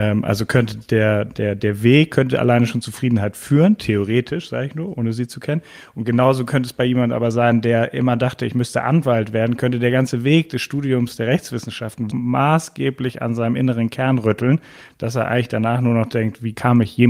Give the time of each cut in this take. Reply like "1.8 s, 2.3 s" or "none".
12.1 s